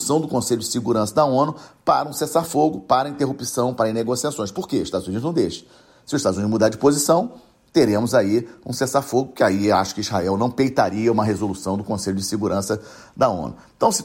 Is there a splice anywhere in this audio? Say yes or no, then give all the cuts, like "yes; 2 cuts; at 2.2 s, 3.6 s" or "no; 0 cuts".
no; 0 cuts